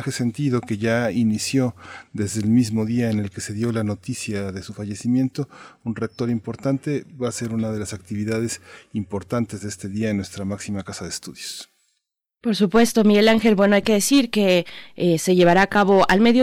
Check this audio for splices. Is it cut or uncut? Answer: uncut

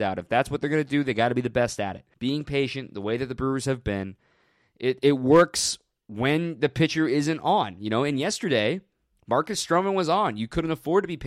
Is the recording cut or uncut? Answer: cut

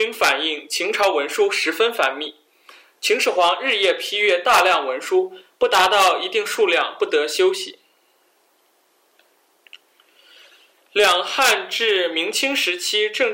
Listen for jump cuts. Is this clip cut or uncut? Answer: uncut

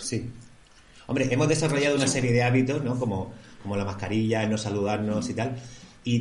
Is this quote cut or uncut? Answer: uncut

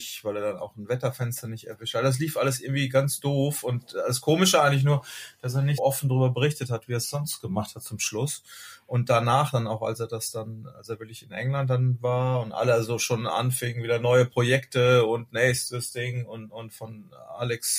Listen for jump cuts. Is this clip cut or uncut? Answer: cut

